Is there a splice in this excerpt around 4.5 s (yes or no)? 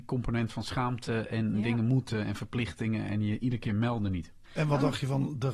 yes